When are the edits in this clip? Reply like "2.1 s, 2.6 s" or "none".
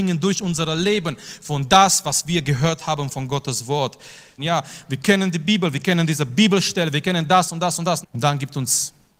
4.4 s, 8.0 s